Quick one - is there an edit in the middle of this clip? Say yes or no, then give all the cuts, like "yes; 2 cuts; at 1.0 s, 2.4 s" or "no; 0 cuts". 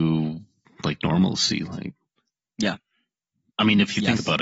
yes; 1 cut; at 3.5 s